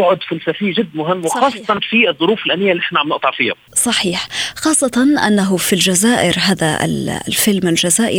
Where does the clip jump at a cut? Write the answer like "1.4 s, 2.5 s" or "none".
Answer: 3.7 s